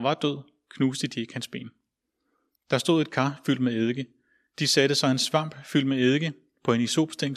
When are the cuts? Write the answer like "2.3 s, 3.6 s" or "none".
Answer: 2.5 s